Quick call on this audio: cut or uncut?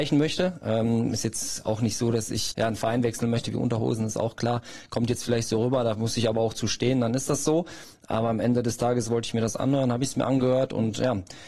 cut